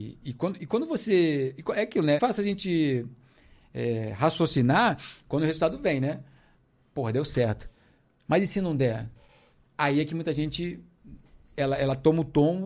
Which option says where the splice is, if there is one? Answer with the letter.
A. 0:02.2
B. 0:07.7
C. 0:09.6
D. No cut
A